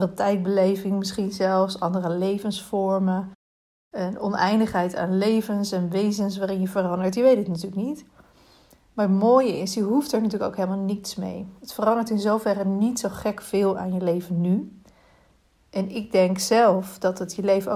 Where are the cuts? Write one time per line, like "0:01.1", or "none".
none